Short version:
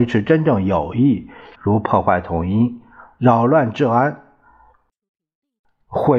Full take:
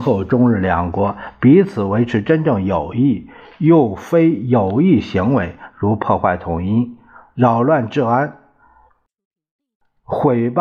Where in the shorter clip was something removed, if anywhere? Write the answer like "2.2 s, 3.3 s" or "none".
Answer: 1.5 s